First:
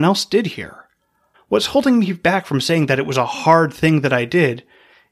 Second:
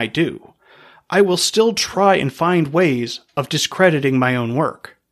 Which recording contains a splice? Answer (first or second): first